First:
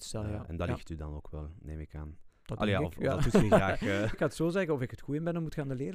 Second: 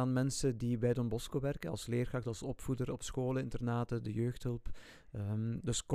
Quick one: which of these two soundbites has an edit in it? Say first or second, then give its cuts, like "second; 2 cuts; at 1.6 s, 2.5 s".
first; 1 cut; at 4.1 s